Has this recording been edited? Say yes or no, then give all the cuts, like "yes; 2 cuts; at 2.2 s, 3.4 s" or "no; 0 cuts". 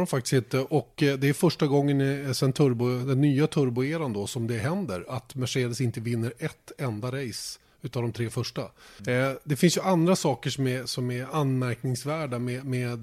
yes; 2 cuts; at 9.0 s, 10.9 s